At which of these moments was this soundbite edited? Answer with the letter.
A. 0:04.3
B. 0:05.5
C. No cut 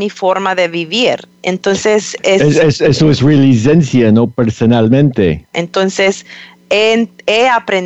B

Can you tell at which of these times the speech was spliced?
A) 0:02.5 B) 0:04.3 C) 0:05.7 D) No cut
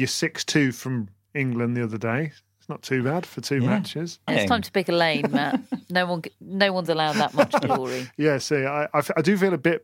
B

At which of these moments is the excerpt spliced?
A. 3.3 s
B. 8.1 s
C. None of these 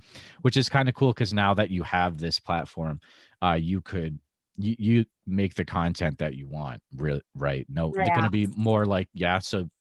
B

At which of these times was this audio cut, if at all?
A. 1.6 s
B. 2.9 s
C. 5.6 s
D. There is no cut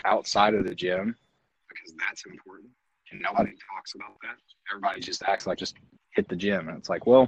C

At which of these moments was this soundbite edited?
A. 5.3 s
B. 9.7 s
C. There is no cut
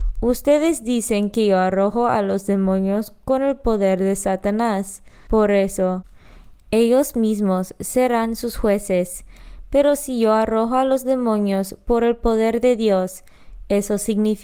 A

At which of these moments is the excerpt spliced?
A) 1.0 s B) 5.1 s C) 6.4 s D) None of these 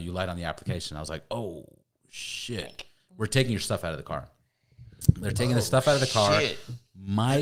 D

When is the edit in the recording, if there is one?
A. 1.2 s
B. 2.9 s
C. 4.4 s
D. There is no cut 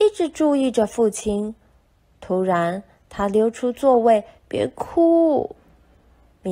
C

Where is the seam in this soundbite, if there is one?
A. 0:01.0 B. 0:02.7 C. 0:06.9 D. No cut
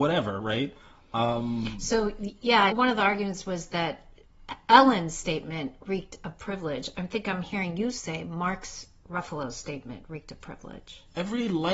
B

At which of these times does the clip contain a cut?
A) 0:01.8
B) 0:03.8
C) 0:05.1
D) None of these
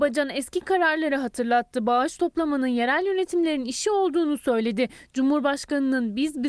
D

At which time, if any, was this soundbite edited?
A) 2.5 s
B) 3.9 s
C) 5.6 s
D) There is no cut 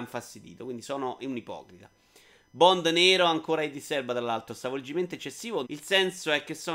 C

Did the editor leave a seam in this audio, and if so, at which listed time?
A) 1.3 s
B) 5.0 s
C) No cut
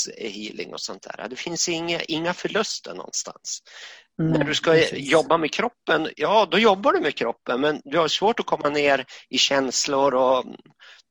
C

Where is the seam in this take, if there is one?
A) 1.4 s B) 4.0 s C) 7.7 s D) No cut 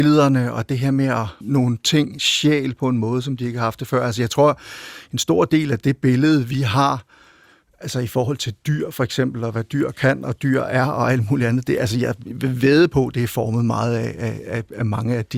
A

